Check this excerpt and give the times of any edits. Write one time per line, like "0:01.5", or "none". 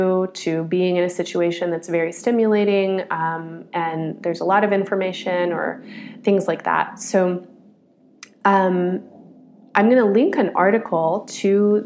none